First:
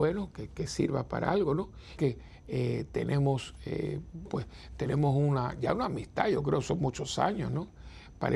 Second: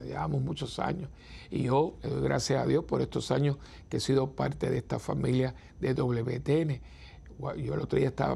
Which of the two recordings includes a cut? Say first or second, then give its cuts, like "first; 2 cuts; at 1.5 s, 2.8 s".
first; 2 cuts; at 2.0 s, 4.3 s